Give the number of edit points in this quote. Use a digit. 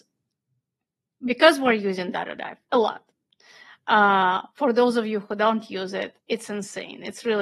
1